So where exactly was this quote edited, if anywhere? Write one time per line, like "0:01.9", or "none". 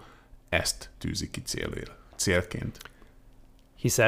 none